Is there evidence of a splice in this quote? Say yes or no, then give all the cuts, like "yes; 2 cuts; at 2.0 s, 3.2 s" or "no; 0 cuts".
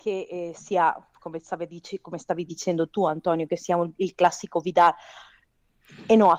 no; 0 cuts